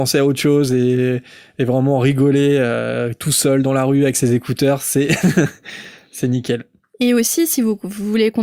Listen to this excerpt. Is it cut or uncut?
uncut